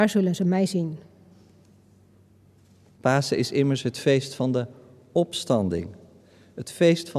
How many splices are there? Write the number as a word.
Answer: one